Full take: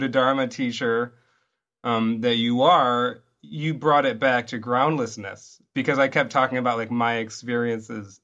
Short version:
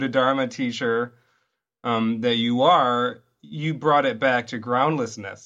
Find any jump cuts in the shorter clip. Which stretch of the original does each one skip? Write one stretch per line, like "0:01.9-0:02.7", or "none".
none